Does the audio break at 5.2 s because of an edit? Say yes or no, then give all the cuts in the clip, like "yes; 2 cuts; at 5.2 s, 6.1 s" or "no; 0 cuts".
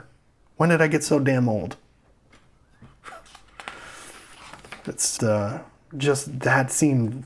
yes; 1 cut; at 5.2 s